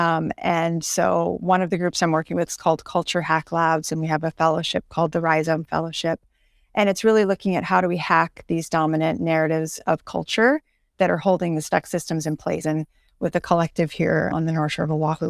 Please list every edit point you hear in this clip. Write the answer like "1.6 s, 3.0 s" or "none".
12.6 s, 14.3 s

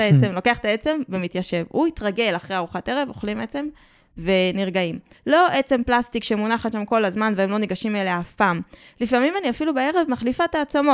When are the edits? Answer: 5.1 s

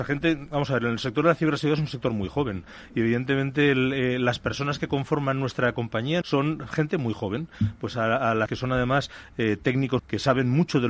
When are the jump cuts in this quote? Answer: 6.2 s, 8.5 s, 10.0 s

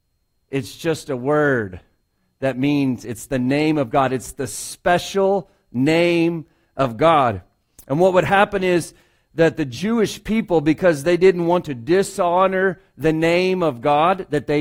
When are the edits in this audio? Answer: none

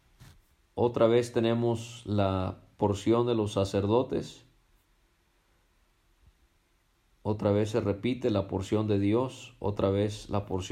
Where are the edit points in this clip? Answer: none

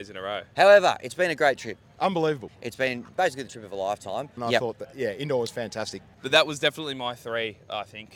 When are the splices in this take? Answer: 2.5 s, 4.4 s, 6.1 s

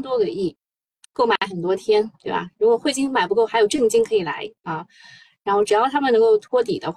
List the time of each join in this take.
none

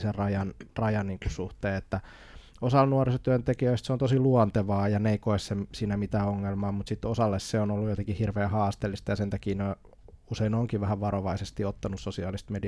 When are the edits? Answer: none

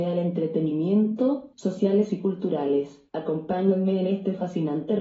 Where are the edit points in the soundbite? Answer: 1.5 s, 3.1 s

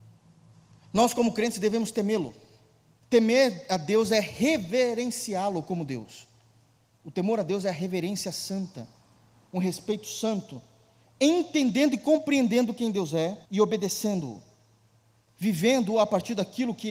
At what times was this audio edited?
3.0 s, 13.4 s

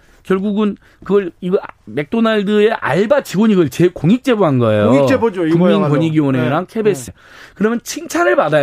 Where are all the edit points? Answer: 7.1 s

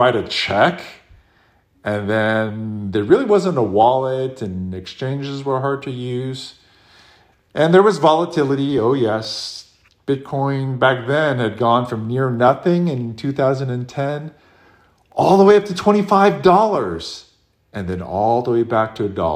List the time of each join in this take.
7.3 s

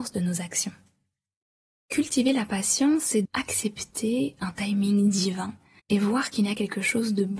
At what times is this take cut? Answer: 3.2 s, 5.8 s

